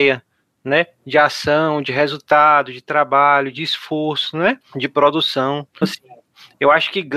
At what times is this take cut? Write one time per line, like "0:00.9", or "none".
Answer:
0:05.8